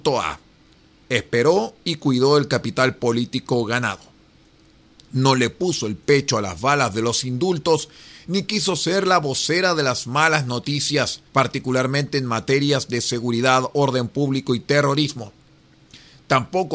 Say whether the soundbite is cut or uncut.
cut